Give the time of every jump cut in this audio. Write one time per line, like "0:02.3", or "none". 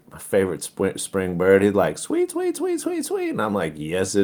none